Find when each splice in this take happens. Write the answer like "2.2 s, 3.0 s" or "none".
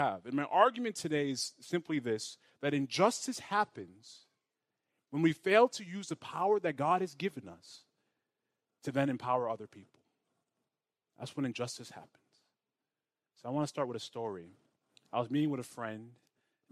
none